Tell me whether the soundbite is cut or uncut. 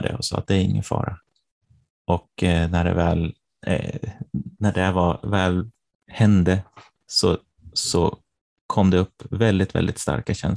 uncut